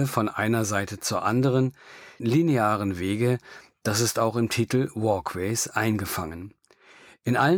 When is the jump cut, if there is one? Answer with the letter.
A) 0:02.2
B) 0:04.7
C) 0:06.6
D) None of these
A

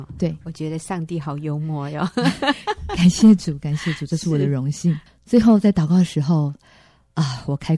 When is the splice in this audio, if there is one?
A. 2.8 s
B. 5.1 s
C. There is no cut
B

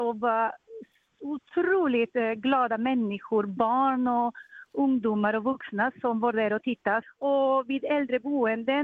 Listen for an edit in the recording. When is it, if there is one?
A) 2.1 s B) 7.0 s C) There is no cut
B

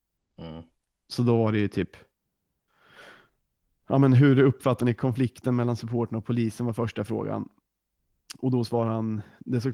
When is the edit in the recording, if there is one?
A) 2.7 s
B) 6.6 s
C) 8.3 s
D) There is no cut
D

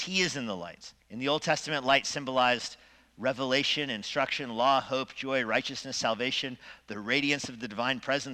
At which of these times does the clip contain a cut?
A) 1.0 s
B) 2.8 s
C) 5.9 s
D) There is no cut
A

